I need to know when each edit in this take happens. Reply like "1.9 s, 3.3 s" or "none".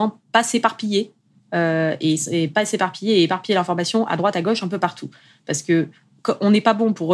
none

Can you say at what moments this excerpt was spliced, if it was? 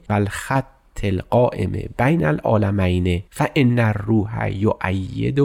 3.3 s

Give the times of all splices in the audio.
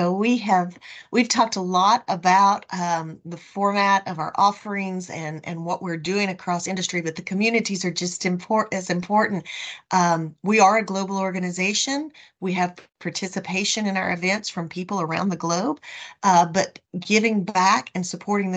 none

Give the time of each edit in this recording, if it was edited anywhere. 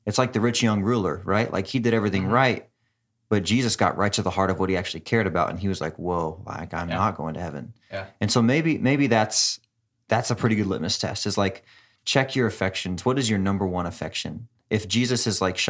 none

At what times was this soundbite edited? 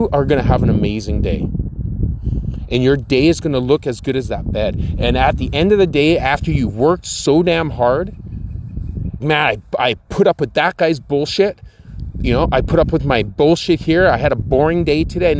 9.2 s

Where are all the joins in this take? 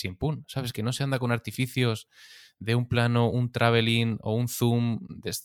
none

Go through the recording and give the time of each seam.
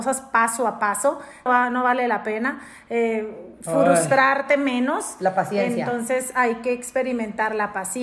1.5 s

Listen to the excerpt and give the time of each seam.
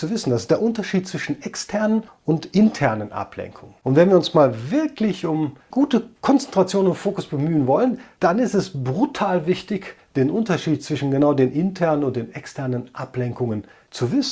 5.7 s

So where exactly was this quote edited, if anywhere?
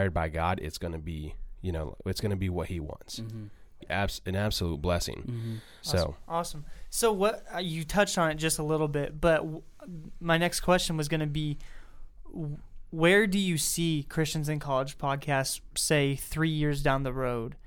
3.8 s, 5.8 s

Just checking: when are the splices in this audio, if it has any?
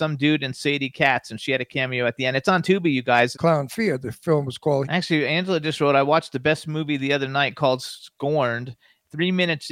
3.3 s, 4.8 s

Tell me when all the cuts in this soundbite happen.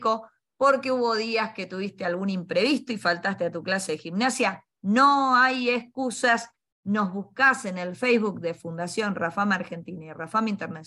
none

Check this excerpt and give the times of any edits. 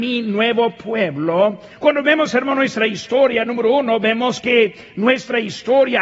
1.7 s

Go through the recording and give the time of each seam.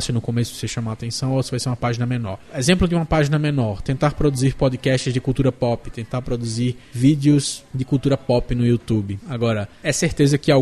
9.2 s

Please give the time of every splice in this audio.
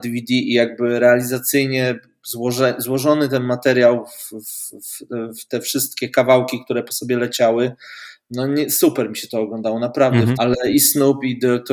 10.4 s

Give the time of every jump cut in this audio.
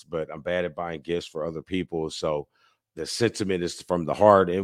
2.8 s

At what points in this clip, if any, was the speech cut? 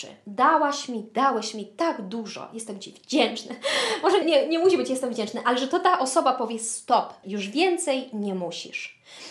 4.2 s, 7.2 s

